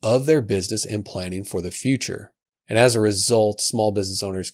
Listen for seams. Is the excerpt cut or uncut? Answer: cut